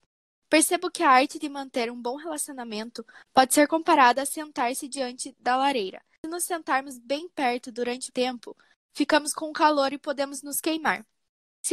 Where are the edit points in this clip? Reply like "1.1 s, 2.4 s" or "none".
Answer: 8.1 s